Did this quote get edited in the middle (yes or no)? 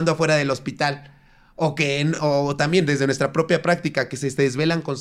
no